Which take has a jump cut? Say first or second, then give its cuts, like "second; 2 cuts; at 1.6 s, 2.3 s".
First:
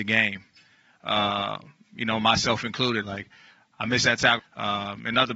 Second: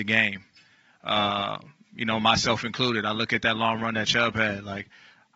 first; 2 cuts; at 3.0 s, 4.4 s